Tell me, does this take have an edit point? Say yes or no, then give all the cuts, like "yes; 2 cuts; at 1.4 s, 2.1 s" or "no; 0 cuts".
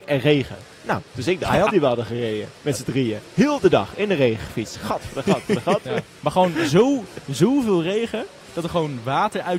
yes; 2 cuts; at 1.7 s, 8.4 s